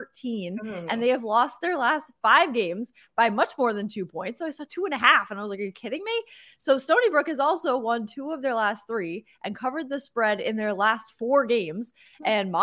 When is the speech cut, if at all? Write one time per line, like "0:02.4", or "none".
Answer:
none